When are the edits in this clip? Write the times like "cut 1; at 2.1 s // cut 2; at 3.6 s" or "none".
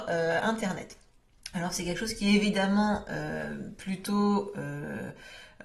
none